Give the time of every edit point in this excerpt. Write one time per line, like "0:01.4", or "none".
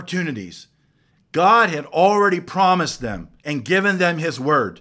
0:01.1
0:03.4